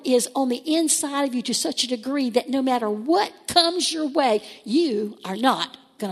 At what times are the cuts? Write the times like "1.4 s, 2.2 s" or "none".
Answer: none